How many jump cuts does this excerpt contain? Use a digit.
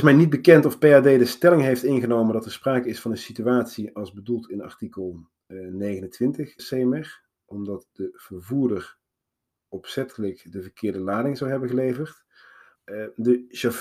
2